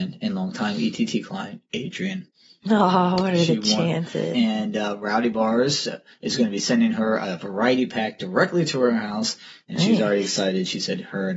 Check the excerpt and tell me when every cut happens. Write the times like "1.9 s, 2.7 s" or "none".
4.3 s